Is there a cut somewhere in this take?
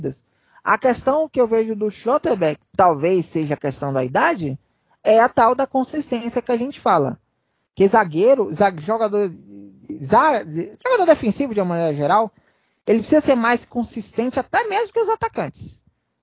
no; 0 cuts

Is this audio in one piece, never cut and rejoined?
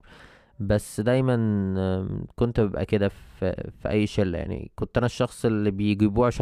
yes; 0 cuts

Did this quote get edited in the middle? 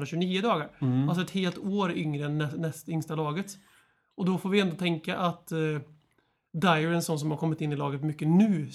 no; 0 cuts

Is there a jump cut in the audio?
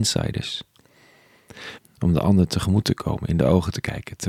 yes; 1 cut; at 1.8 s

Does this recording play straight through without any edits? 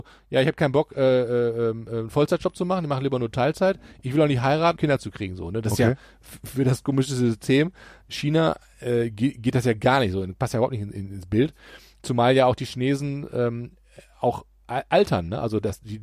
no; 1 cut; at 4.8 s

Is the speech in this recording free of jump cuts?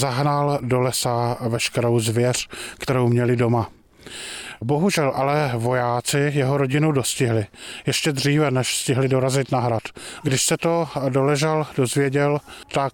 no; 1 cut; at 10.2 s

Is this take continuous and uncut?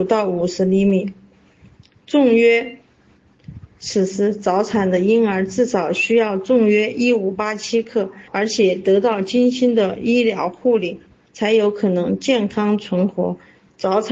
no; 2 cuts; at 3.7 s, 8.3 s

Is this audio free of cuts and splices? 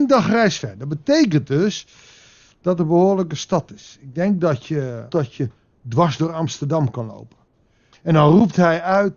no; 2 cuts; at 5.1 s, 7.9 s

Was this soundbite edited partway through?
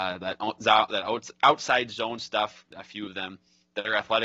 yes; 1 cut; at 2.7 s

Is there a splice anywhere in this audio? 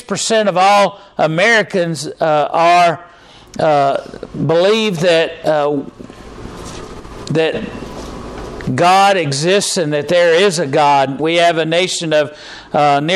yes; 1 cut; at 11.2 s

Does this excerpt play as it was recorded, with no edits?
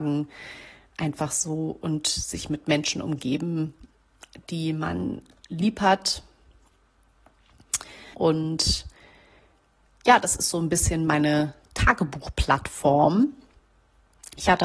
no; 1 cut; at 8.1 s

